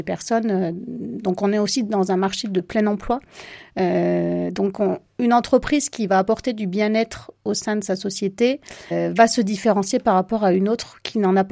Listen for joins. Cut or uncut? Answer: uncut